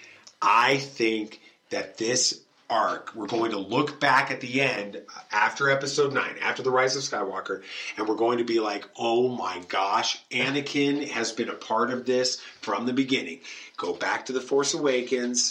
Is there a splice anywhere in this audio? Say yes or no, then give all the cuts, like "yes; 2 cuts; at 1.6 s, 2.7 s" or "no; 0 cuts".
no; 0 cuts